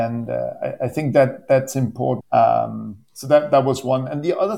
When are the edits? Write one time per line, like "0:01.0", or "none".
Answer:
0:02.2